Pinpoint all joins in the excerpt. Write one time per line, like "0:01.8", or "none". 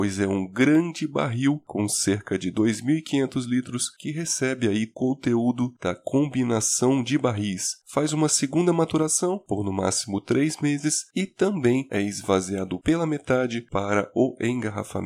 none